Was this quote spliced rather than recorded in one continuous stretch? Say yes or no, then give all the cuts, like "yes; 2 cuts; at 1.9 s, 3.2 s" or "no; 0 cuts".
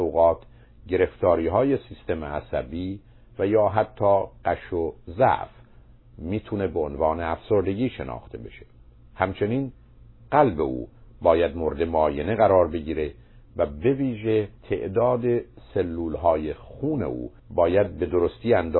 yes; 2 cuts; at 14.6 s, 17.4 s